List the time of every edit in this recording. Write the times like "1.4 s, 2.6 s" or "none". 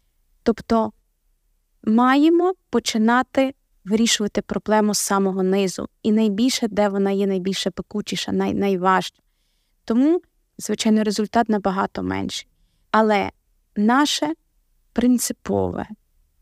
10.5 s, 12.8 s

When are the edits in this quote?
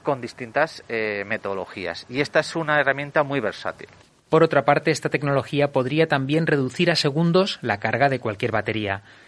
none

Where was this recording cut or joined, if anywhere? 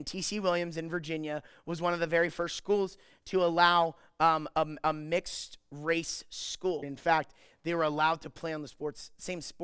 6.8 s

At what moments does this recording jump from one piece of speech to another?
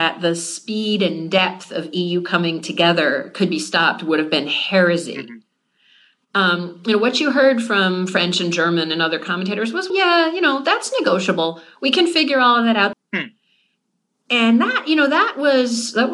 9.9 s, 12.9 s

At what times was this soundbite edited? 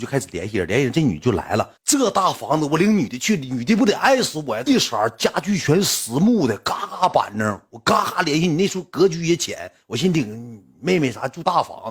1.8 s, 4.6 s

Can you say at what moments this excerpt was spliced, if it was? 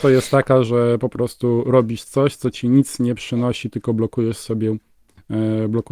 none

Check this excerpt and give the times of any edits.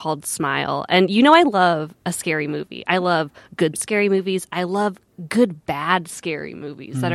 3.7 s

